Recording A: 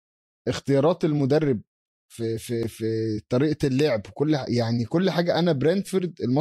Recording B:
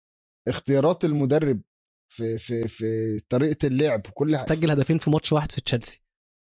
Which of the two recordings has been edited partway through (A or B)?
B